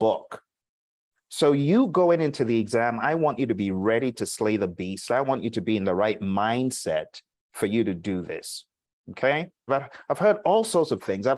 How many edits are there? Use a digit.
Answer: 1